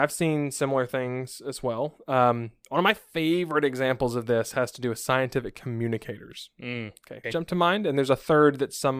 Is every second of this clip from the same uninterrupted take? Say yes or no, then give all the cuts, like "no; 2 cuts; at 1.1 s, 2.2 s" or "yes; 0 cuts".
no; 1 cut; at 7.2 s